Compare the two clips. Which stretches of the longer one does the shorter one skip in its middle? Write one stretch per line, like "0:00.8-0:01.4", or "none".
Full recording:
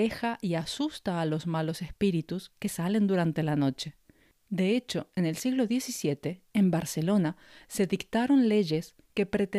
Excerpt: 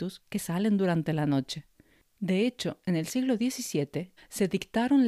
0:06.5-0:07.6